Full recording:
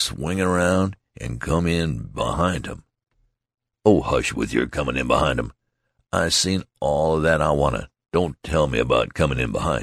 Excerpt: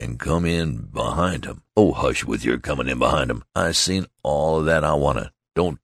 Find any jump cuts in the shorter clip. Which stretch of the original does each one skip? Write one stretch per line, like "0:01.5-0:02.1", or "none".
0:02.9-0:03.8
0:05.6-0:06.1